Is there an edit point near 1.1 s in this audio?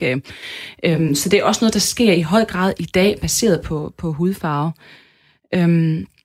no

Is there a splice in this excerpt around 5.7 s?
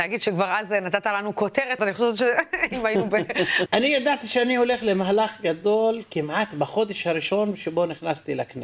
no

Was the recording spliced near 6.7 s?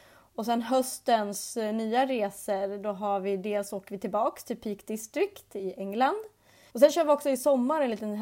yes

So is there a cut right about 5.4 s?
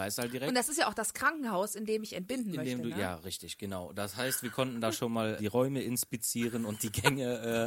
yes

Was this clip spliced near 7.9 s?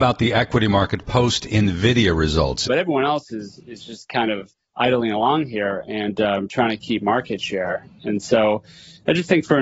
no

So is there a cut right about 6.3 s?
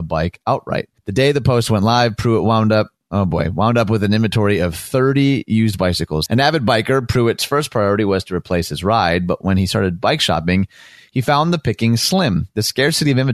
yes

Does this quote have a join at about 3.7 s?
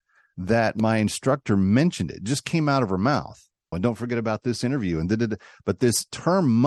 yes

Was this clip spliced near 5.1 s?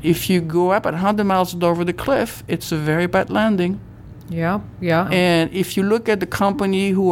yes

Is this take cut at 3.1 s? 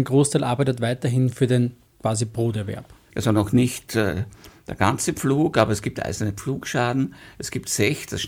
yes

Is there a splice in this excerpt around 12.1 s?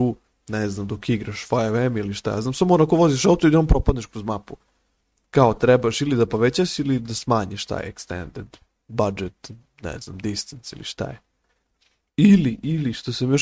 yes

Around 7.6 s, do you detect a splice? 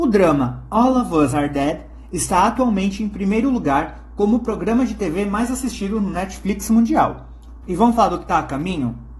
yes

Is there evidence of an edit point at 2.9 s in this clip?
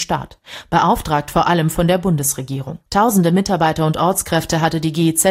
yes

